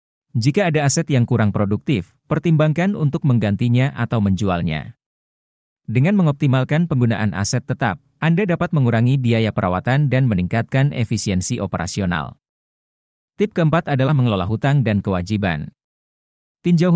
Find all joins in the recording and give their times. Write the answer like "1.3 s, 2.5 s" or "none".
none